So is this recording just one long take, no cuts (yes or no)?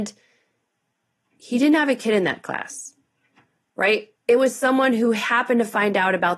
yes